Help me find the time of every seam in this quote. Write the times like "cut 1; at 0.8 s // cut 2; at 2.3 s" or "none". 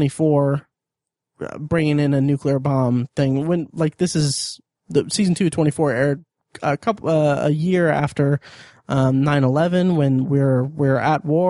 none